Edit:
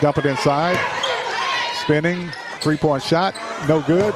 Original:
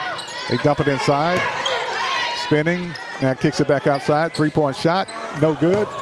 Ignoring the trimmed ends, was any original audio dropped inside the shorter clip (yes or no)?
yes